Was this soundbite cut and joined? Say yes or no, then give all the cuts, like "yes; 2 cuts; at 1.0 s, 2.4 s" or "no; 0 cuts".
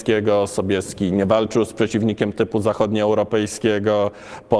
no; 0 cuts